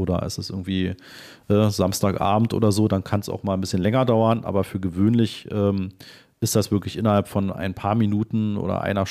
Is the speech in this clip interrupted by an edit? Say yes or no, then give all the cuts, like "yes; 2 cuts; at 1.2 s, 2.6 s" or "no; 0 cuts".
no; 0 cuts